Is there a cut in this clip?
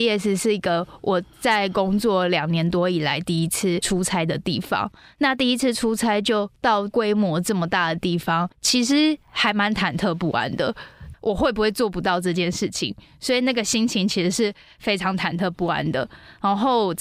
yes; 2 cuts; at 8.5 s, 11.1 s

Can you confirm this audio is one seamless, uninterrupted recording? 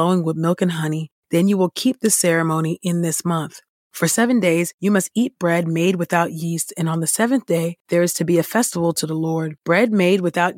yes; 0 cuts

